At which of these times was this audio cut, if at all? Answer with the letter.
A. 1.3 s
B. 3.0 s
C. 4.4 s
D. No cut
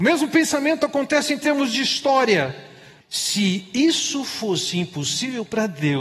B